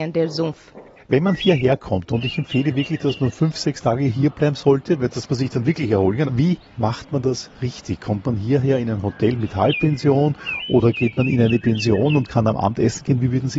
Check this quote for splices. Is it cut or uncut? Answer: cut